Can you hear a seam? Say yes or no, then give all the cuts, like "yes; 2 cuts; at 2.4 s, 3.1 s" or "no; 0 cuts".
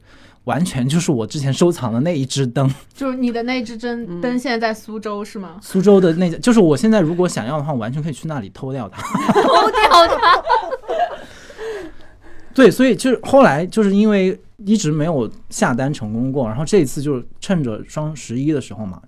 no; 0 cuts